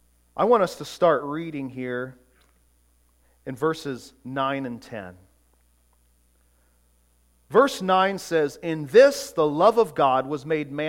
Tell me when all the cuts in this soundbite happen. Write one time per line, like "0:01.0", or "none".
none